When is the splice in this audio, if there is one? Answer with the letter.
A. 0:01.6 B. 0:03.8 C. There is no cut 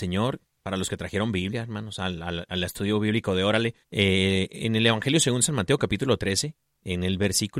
B